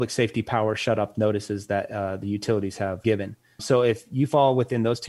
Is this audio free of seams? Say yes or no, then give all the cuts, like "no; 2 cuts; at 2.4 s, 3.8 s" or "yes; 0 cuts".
yes; 0 cuts